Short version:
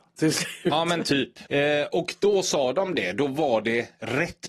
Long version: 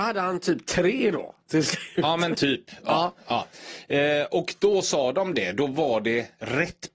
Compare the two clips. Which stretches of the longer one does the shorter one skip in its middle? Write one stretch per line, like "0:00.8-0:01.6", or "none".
0:02.8-0:03.9